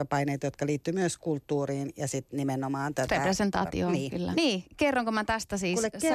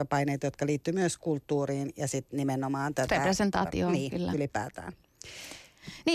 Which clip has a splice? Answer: first; 1 cut; at 4.3 s

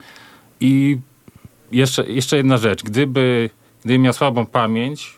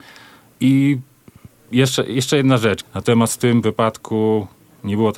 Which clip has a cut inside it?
second; 1 cut; at 2.8 s

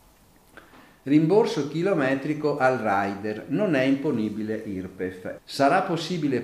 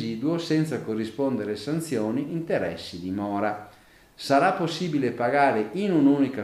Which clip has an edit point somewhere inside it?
first; 1 cut; at 5.4 s

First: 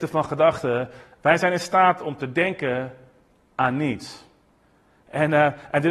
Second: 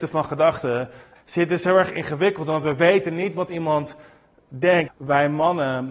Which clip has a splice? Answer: second; 2 cuts; at 1.2 s, 4.9 s

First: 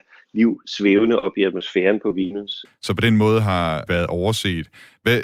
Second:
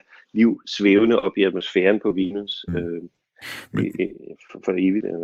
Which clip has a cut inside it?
first; 2 cuts; at 2.7 s, 3.9 s

